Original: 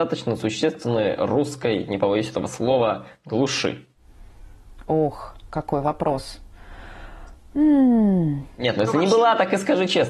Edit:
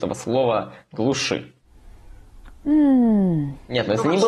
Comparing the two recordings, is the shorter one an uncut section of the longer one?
no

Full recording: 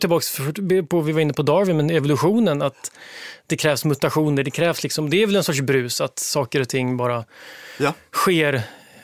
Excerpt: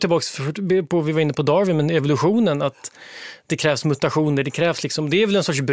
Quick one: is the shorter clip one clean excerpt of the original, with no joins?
yes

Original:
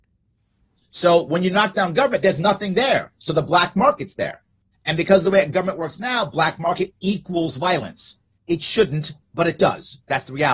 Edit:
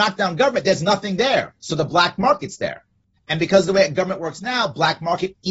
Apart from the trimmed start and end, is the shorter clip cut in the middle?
no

